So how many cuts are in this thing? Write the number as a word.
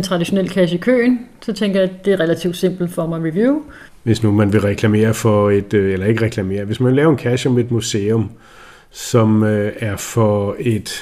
one